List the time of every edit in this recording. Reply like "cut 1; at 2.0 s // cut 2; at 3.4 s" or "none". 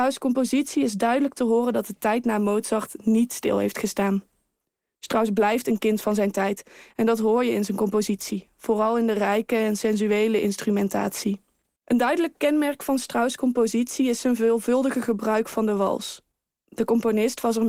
cut 1; at 11.8 s